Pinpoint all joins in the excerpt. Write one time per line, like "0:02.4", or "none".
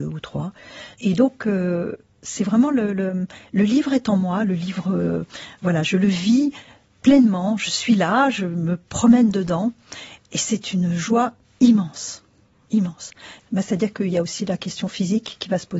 0:00.9
0:13.4